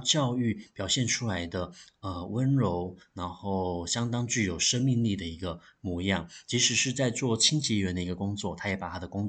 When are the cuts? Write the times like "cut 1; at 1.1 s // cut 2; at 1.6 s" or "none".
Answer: none